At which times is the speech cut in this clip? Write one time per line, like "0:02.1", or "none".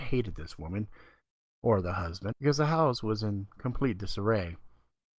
0:02.3

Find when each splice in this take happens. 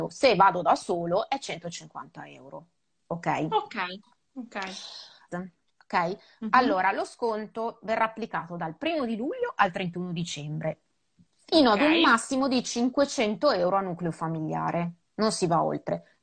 0:05.3

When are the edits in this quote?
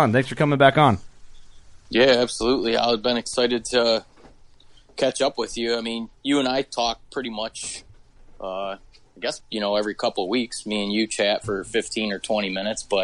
0:09.4

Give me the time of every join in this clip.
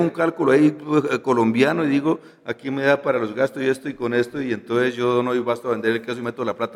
none

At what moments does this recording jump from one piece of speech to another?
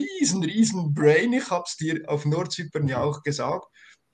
none

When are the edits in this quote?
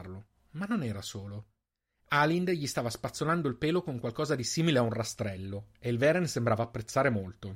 none

